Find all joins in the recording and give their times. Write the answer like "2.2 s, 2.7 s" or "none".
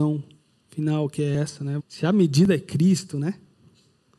1.8 s